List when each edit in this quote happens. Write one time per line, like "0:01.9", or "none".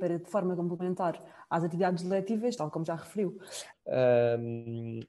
0:02.6
0:03.7